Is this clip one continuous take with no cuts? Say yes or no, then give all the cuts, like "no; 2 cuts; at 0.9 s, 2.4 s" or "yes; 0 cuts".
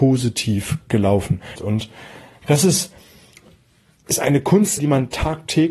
no; 2 cuts; at 1.5 s, 4.8 s